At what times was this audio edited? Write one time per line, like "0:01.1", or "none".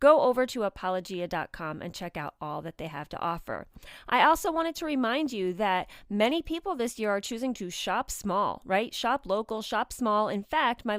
none